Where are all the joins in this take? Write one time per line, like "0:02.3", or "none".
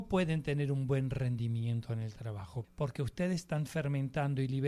0:02.6